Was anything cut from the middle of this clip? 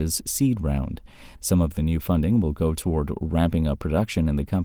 yes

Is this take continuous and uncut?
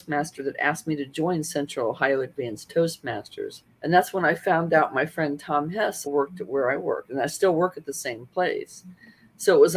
no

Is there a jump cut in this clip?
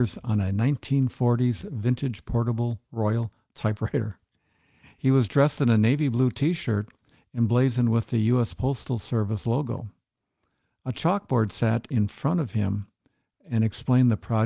no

